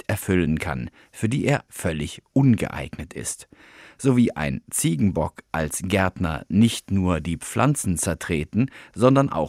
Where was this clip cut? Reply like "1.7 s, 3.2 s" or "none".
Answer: 1.7 s